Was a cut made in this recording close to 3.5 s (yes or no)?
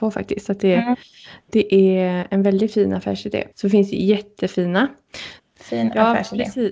yes